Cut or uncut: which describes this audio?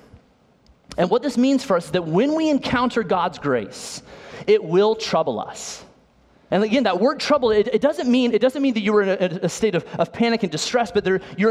cut